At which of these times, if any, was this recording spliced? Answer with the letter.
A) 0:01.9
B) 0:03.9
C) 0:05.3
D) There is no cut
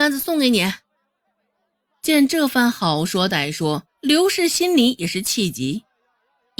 B